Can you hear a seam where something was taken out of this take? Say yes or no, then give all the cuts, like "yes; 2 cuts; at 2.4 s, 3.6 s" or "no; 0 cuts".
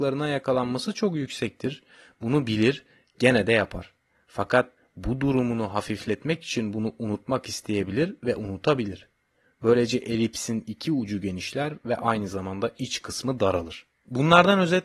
yes; 1 cut; at 13.9 s